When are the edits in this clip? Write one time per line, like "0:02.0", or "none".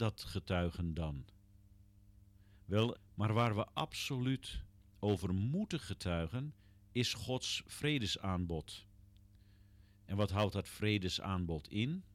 0:02.9